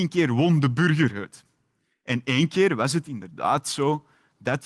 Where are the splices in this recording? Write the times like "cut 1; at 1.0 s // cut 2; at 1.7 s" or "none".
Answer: none